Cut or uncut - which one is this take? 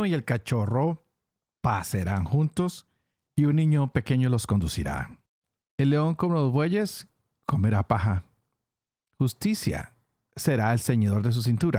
cut